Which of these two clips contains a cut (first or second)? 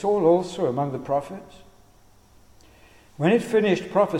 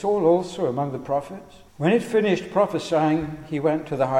second